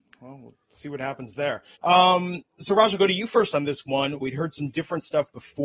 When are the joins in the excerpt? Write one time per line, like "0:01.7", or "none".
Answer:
0:01.7
0:04.2